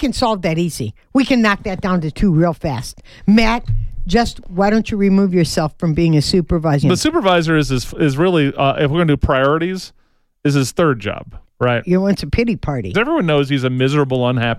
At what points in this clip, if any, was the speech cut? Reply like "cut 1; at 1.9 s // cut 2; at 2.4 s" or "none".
cut 1; at 6.8 s // cut 2; at 11.4 s // cut 3; at 12.9 s